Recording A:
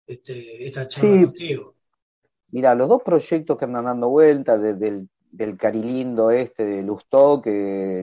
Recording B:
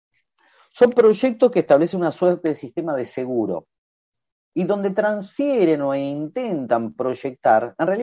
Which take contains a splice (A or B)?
A